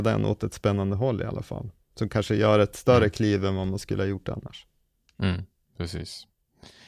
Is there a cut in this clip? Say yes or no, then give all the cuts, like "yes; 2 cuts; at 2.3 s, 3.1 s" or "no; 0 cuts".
no; 0 cuts